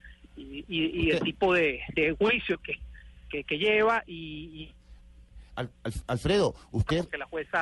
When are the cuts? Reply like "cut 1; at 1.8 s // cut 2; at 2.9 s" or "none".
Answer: cut 1; at 1.9 s